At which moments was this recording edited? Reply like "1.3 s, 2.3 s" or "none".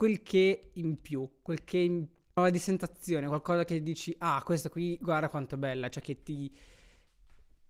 2.4 s